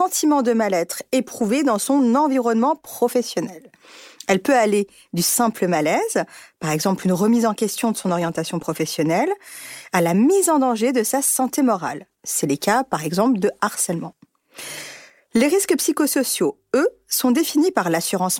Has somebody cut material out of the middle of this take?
no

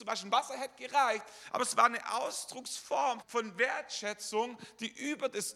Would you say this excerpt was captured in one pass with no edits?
no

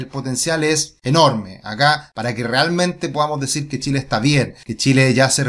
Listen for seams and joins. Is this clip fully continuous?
yes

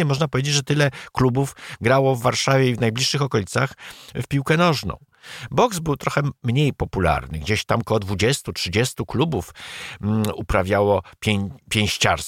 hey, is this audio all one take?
yes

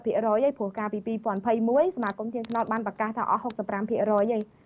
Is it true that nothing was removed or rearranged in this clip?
yes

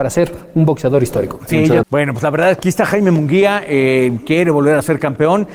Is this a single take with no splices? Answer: no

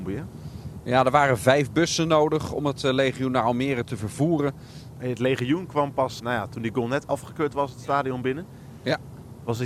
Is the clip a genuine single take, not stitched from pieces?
no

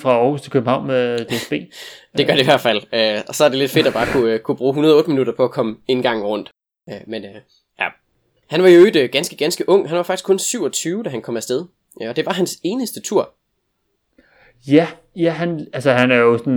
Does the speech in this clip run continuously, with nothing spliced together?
yes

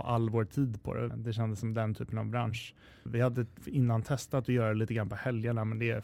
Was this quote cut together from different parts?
yes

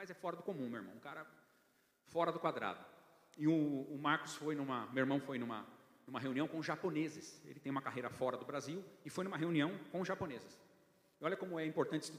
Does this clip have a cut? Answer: no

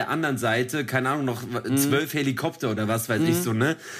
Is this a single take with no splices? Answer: yes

